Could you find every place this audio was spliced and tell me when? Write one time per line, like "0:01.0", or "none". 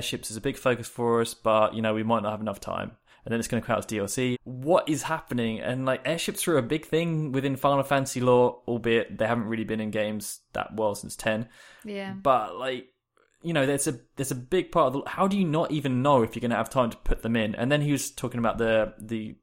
0:04.3